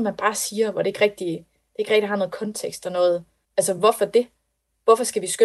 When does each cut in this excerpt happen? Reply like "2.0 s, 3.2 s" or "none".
3.4 s